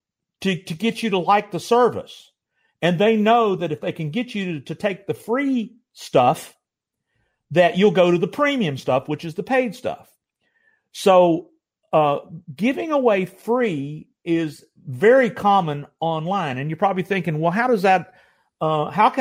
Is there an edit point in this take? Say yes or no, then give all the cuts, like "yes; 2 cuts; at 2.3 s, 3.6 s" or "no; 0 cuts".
no; 0 cuts